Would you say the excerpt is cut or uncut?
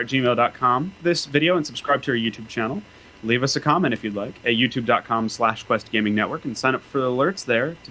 cut